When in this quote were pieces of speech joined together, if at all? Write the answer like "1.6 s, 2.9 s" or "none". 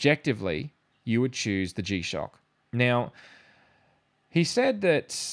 0.9 s, 2.6 s